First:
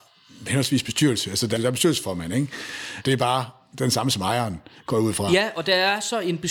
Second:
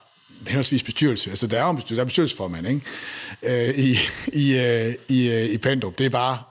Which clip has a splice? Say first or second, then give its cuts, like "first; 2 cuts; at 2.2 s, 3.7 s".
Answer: first; 2 cuts; at 1.6 s, 3.0 s